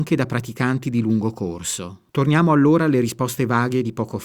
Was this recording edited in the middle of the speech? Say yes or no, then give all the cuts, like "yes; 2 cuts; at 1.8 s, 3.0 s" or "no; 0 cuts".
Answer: yes; 1 cut; at 2.1 s